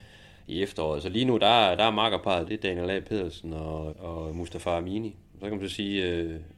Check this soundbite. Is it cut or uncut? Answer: cut